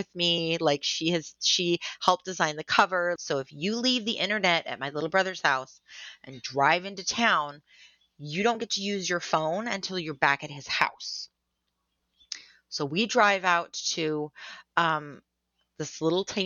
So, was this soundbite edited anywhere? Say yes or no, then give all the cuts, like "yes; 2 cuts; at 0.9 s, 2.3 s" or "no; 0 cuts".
yes; 1 cut; at 3.2 s